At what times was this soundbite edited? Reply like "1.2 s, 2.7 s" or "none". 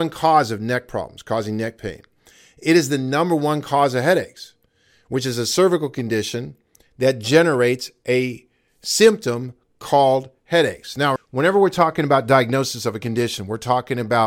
11.2 s

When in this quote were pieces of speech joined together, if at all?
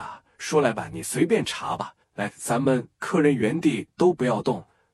2.0 s

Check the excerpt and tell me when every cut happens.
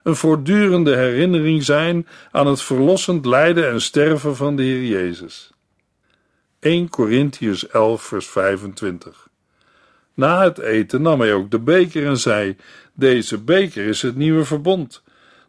none

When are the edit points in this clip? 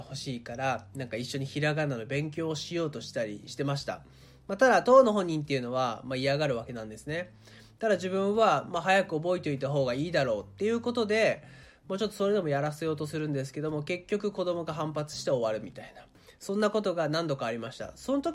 none

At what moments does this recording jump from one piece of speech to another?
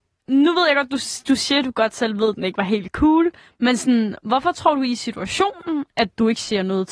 none

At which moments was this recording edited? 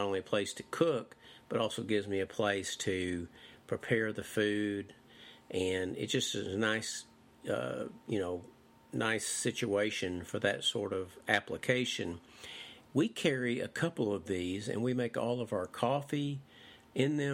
12.8 s

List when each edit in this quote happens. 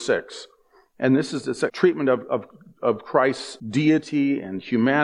1.7 s, 3.6 s

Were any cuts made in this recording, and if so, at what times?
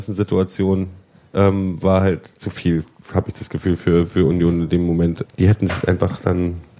5.2 s

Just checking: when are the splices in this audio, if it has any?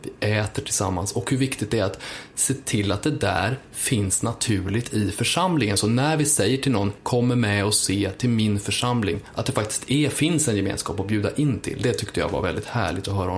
7.0 s

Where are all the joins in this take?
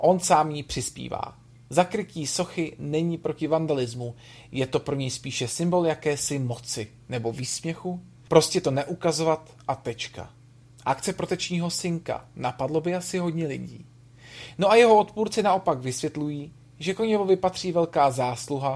none

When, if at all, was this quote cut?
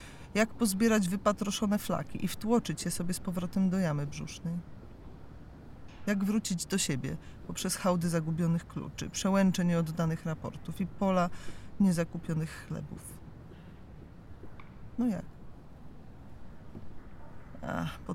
14.9 s

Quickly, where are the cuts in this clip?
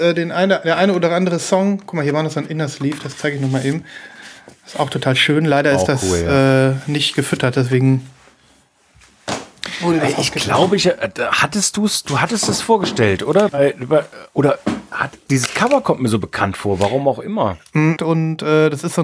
13.5 s, 15.3 s, 18.0 s

